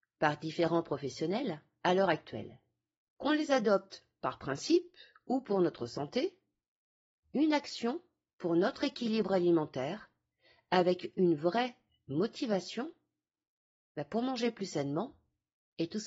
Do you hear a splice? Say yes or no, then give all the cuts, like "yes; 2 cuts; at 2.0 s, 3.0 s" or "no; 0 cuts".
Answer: yes; 2 cuts; at 3.2 s, 7.2 s